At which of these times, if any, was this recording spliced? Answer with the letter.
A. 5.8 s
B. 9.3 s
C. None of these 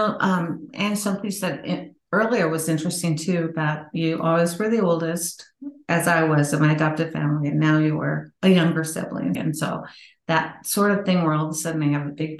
B